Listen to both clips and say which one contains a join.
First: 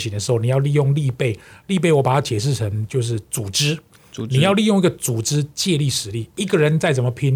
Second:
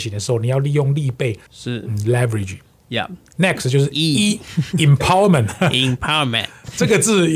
second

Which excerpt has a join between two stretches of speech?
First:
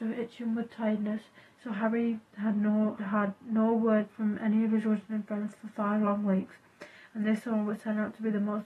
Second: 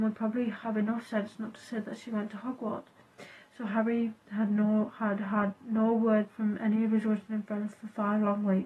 first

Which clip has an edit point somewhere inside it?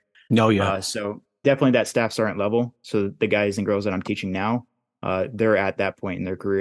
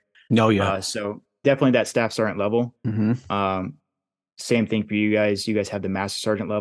second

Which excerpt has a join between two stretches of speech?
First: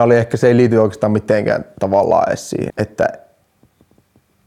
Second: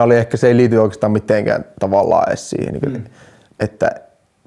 first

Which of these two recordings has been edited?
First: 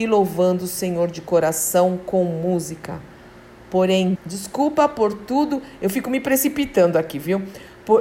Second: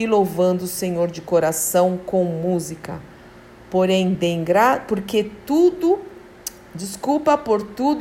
first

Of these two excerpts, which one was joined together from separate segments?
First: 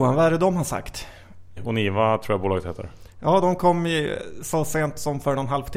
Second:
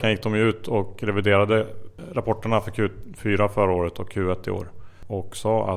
first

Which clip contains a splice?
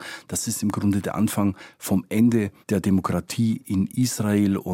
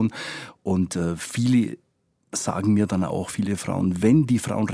first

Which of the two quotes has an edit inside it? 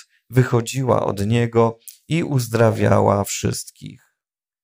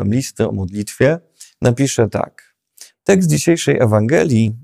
second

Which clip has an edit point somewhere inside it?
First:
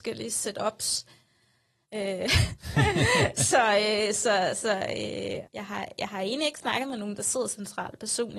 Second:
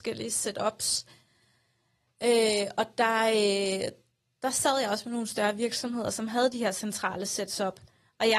first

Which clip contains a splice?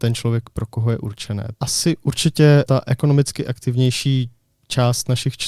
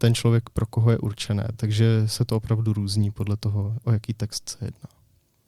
first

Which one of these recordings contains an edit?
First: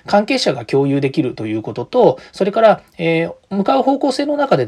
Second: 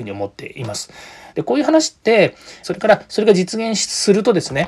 second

